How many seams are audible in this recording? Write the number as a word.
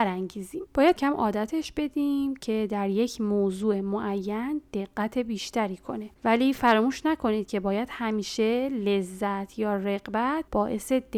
one